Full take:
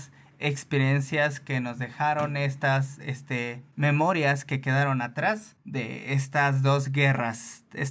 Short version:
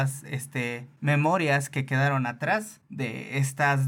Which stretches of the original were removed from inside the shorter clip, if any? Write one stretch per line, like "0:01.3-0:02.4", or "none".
none